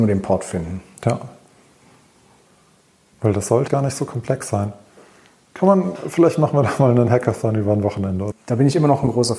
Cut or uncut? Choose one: cut